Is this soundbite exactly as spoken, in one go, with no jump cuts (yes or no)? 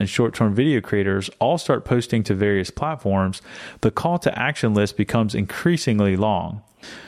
yes